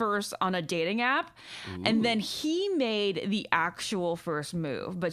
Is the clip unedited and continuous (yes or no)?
yes